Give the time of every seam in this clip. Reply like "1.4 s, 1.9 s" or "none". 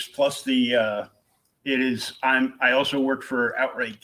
1.6 s